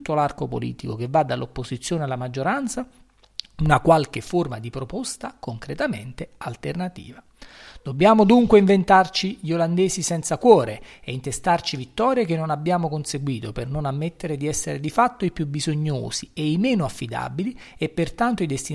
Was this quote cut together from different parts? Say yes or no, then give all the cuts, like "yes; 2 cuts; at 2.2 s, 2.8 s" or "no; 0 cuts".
no; 0 cuts